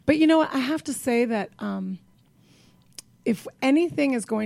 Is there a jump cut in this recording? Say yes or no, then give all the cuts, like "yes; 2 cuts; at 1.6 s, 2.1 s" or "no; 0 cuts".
no; 0 cuts